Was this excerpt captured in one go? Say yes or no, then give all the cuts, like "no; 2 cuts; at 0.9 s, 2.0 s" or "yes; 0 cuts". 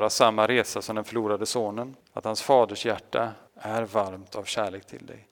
no; 2 cuts; at 2.0 s, 3.5 s